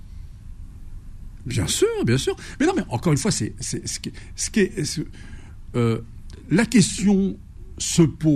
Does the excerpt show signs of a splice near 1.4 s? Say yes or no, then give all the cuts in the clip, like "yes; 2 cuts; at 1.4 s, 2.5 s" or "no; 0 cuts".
yes; 1 cut; at 1.4 s